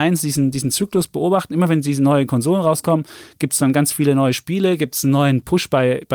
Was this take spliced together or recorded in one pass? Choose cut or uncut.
uncut